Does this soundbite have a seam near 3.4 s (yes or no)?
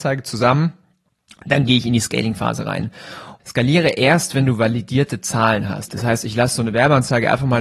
yes